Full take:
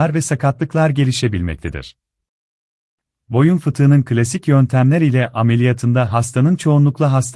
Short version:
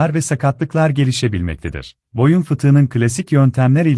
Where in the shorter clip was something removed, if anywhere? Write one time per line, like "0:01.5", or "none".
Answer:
0:02.0